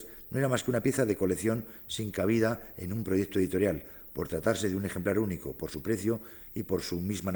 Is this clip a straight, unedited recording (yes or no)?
yes